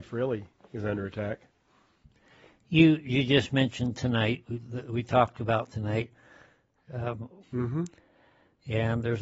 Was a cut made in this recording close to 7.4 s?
yes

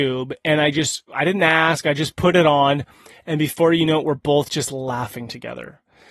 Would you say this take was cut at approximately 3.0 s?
no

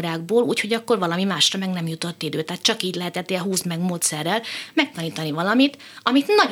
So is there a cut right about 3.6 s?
yes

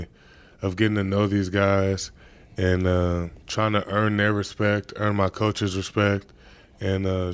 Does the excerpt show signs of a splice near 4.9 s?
no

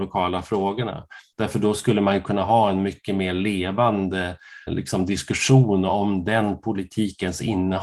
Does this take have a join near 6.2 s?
no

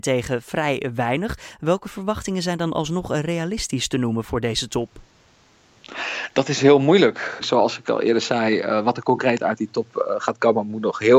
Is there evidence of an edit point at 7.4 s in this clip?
yes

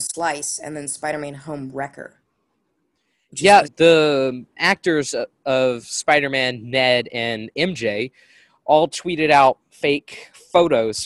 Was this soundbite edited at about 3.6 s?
yes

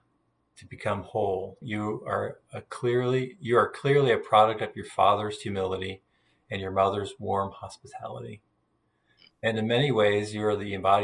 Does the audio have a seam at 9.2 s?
no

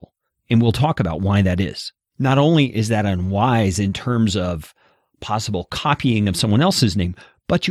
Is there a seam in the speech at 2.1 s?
yes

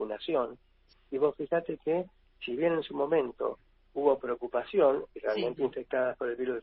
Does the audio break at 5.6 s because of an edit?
yes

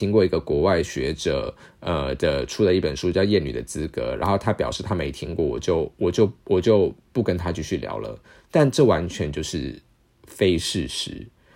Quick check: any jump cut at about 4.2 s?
no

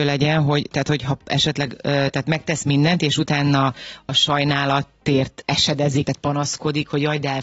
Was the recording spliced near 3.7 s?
no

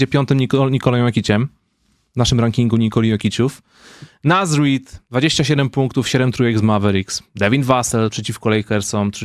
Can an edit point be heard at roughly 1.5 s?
no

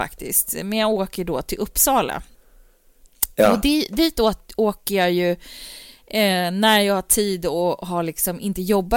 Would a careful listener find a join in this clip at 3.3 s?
no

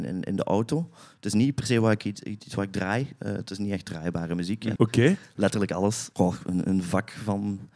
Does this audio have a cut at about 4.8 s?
yes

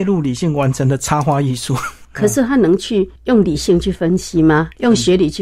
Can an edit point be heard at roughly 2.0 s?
yes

